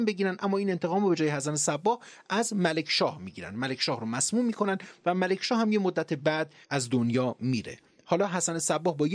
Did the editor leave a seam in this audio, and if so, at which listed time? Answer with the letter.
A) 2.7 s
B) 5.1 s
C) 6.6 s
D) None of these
C